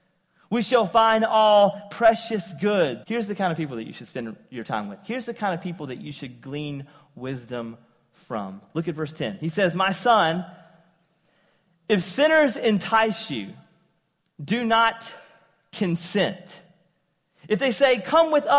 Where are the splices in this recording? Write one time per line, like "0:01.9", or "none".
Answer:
0:03.0